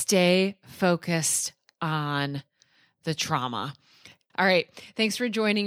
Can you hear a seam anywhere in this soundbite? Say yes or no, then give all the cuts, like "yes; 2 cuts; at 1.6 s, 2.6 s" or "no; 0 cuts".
yes; 1 cut; at 4.3 s